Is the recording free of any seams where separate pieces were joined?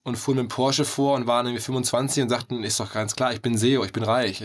yes; 0 cuts

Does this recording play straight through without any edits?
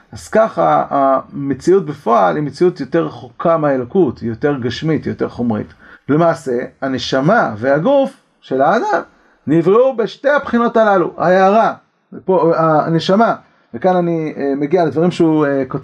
no; 1 cut; at 5.9 s

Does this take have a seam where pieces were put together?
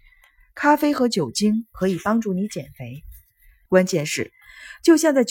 yes; 1 cut; at 3.7 s

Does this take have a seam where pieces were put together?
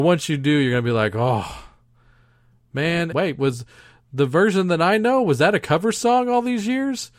yes; 1 cut; at 3.1 s

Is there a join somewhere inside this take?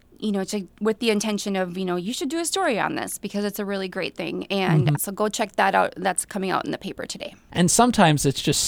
yes; 2 cuts; at 4.9 s, 7.5 s

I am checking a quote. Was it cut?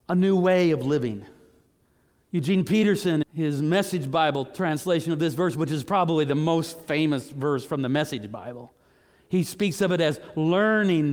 yes; 1 cut; at 3.2 s

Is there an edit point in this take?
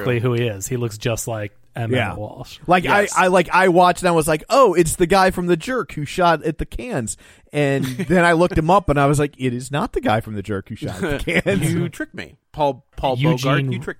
yes; 1 cut; at 12.4 s

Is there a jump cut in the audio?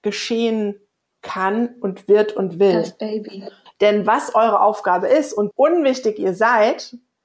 yes; 2 cuts; at 3.7 s, 5.5 s

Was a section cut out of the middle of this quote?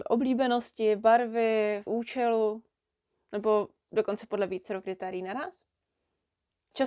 yes; 1 cut; at 1.9 s

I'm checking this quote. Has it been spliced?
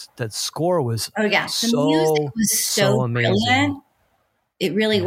no; 0 cuts

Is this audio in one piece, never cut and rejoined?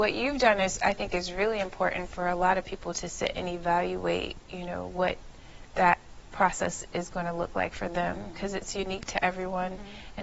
yes; 0 cuts

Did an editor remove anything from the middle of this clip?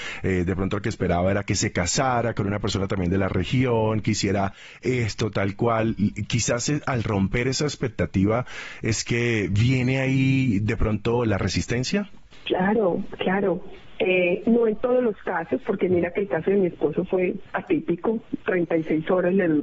no; 0 cuts

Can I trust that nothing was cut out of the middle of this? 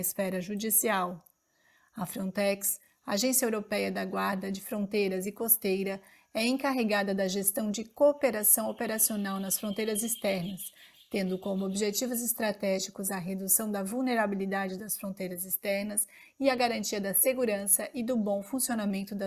yes; 0 cuts

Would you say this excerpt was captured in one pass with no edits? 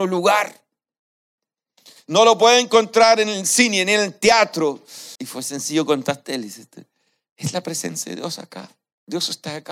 no; 1 cut; at 5.2 s

